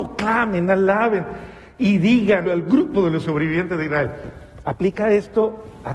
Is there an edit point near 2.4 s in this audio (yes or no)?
yes